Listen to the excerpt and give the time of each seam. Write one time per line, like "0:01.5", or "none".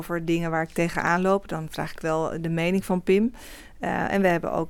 none